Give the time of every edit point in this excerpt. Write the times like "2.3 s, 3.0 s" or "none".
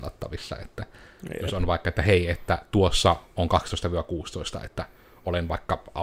none